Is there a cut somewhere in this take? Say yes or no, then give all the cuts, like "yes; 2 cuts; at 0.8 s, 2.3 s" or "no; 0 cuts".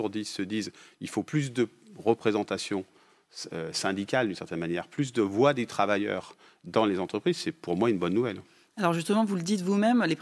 no; 0 cuts